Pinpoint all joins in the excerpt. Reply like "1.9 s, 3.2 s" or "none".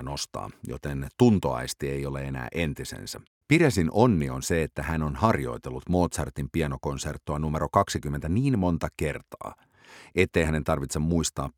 3.3 s